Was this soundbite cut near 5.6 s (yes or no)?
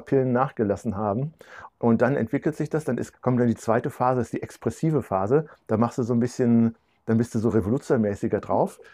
no